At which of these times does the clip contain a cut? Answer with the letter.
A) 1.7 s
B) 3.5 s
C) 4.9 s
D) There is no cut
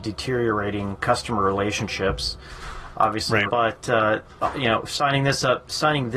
B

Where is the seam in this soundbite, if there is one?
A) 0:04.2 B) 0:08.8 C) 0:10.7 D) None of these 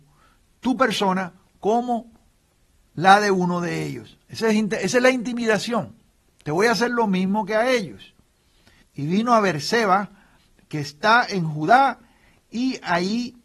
B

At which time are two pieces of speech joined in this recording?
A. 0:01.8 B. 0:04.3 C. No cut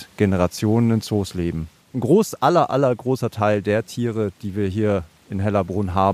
A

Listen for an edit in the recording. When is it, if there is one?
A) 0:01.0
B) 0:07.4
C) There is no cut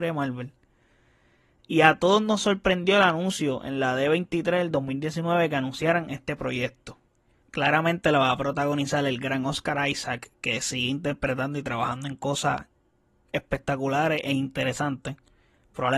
B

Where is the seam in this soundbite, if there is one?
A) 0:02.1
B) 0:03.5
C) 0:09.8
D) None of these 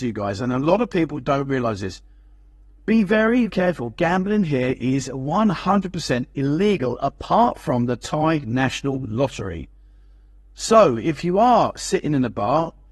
B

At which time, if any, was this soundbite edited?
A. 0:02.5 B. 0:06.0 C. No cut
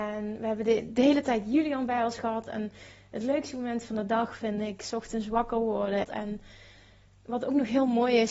B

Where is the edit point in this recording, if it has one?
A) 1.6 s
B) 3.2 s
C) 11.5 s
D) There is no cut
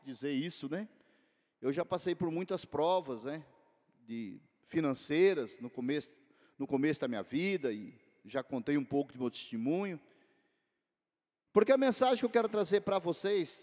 C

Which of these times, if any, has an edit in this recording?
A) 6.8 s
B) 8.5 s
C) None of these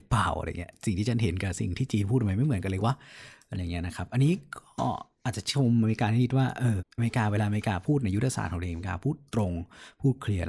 A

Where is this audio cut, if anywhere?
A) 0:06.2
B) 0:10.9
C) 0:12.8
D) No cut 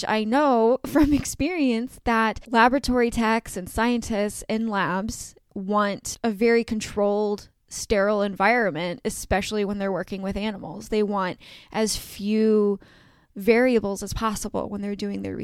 D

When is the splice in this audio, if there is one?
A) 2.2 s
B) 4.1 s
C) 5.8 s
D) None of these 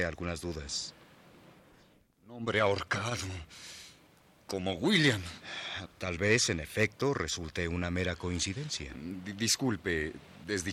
C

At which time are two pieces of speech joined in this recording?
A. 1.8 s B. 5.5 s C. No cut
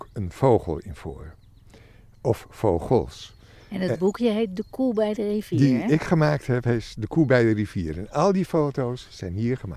C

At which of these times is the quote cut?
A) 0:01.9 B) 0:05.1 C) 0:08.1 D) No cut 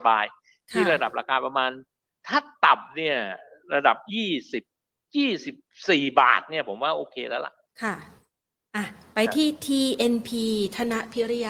D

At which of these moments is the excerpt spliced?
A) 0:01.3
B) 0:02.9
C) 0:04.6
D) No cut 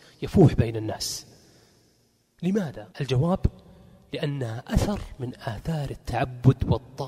B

